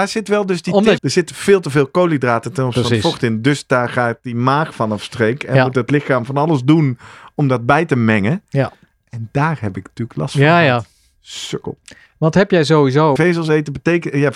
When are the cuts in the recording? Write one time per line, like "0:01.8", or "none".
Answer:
0:01.0
0:13.2